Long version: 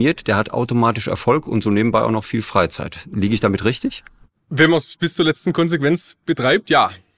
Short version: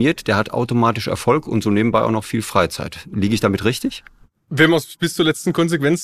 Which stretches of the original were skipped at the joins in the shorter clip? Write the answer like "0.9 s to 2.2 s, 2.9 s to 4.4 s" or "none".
none